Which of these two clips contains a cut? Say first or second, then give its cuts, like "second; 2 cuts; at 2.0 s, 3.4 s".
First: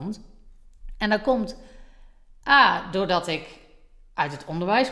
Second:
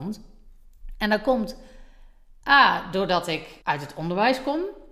second; 1 cut; at 3.6 s